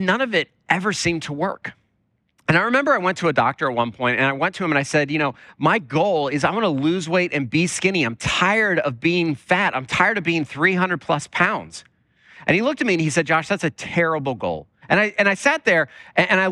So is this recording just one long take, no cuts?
no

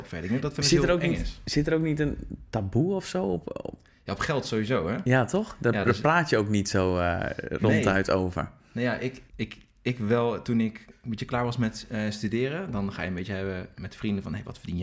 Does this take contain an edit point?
yes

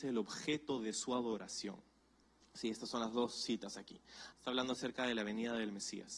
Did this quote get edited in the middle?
yes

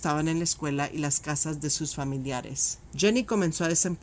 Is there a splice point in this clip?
no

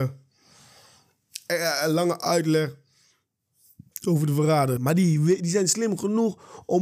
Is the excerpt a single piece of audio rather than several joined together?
no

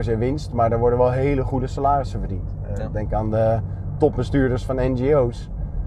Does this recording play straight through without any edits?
yes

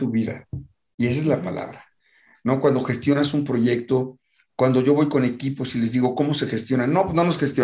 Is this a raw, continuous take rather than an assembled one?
yes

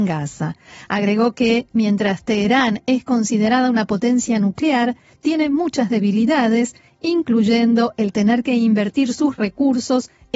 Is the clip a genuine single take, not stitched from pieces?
yes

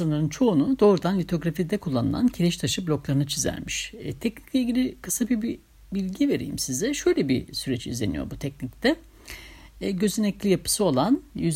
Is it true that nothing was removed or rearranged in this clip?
yes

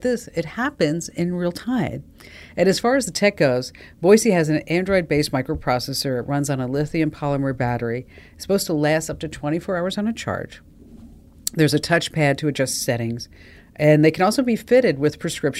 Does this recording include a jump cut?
no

